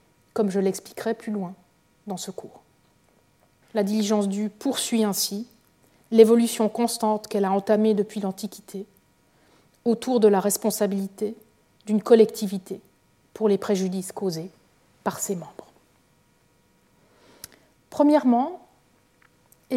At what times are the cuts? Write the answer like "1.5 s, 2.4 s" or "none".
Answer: 3.6 s, 17.8 s

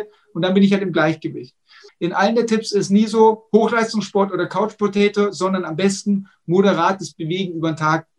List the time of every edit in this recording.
1.9 s

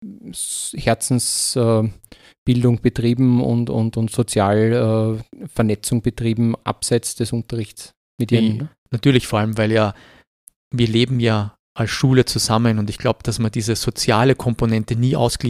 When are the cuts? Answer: 8.6 s

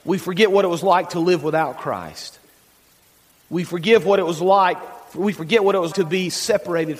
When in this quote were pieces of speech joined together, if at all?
5.9 s

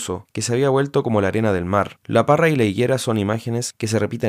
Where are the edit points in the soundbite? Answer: 2.0 s

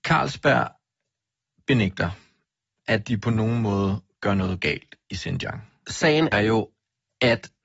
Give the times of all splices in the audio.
6.3 s

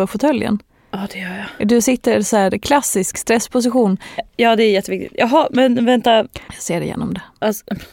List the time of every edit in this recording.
4.2 s, 6.5 s

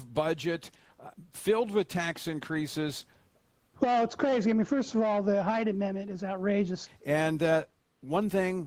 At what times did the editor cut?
3.7 s, 6.9 s

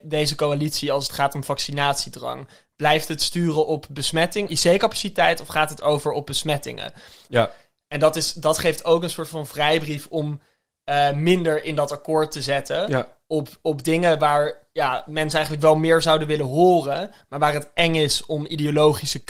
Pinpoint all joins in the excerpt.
4.5 s, 7.3 s

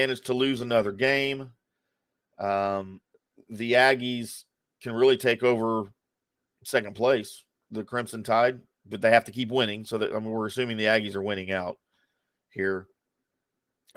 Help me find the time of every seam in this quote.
7.6 s

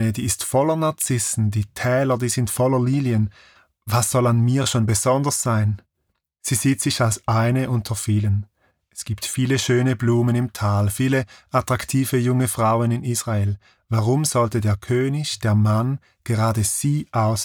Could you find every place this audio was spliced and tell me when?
none

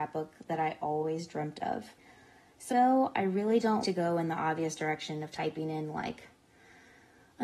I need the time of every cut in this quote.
2.7 s, 3.8 s

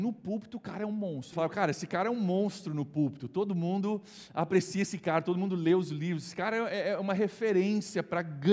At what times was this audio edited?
1.3 s

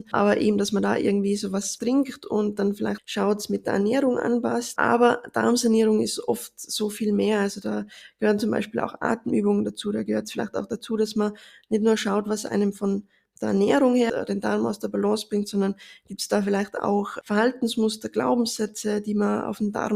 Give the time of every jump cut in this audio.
none

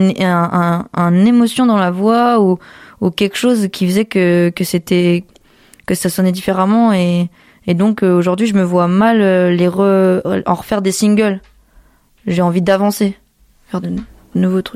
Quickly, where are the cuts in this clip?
13.8 s

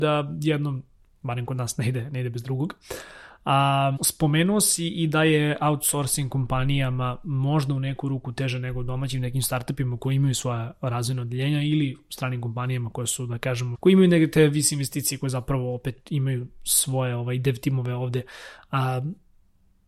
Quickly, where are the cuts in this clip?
4.0 s, 13.7 s

